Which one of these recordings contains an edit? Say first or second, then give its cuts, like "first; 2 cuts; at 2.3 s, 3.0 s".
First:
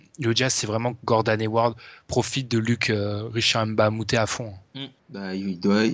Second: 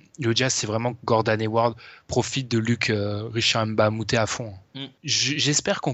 second; 1 cut; at 5.0 s